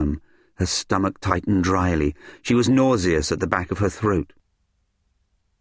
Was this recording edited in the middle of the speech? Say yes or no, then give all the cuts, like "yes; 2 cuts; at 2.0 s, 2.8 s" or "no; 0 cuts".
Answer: no; 0 cuts